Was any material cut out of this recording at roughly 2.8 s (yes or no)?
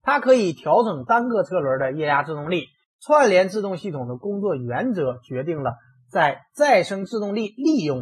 yes